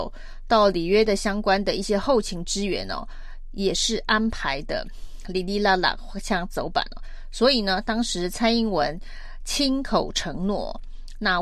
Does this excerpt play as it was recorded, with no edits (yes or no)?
yes